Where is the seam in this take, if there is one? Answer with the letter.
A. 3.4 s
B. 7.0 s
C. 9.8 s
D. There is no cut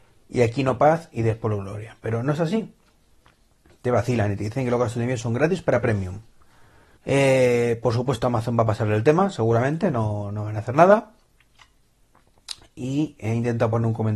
B